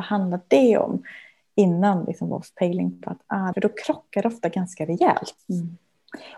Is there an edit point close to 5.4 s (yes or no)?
yes